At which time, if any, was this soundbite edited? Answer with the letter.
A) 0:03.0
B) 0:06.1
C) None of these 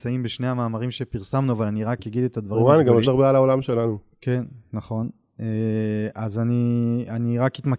A